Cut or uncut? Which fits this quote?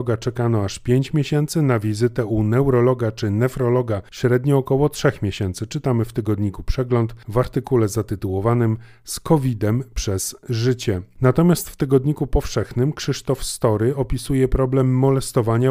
uncut